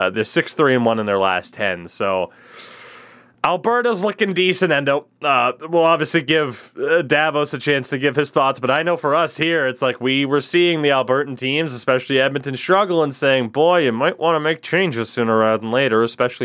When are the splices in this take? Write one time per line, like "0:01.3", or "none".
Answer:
none